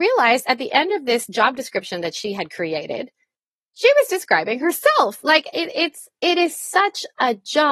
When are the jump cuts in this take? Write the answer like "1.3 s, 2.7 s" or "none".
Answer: none